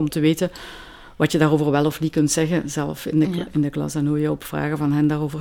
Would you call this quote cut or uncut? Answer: uncut